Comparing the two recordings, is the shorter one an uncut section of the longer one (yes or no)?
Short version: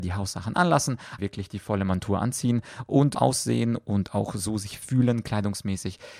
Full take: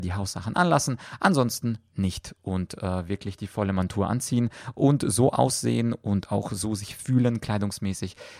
no